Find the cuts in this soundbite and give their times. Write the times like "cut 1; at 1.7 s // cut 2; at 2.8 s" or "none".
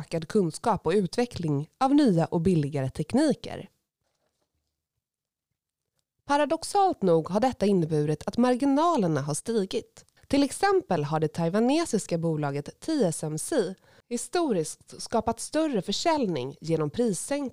cut 1; at 10.2 s // cut 2; at 14.0 s